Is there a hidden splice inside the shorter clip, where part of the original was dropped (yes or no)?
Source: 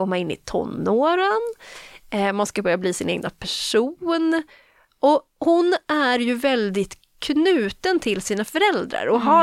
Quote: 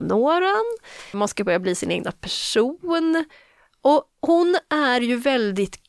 yes